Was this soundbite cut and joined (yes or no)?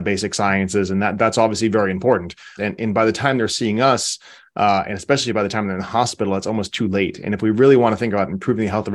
yes